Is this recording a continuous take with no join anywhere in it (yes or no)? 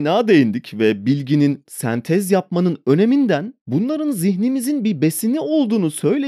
no